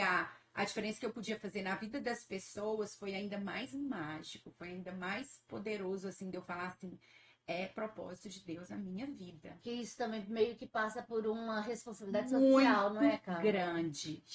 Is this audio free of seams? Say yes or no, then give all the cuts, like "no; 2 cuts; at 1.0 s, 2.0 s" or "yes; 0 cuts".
yes; 0 cuts